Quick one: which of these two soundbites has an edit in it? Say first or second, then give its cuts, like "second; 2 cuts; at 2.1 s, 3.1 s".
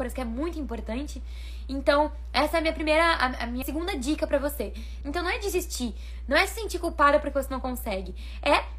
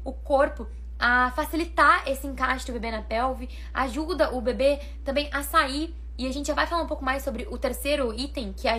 first; 2 cuts; at 3.6 s, 5.0 s